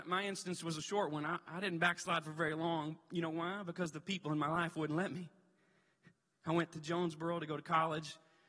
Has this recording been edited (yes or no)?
no